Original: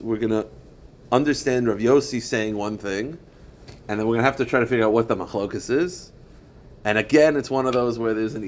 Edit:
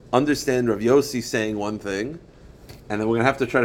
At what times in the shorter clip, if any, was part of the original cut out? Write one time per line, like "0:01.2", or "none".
none